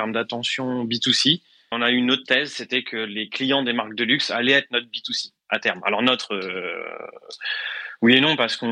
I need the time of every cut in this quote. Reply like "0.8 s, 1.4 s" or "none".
1.7 s